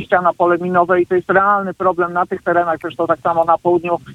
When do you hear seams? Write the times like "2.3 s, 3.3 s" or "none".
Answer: none